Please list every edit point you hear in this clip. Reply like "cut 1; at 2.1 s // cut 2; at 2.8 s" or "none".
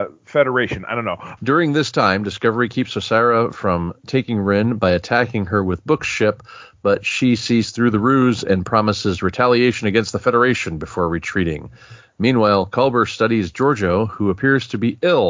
cut 1; at 1.4 s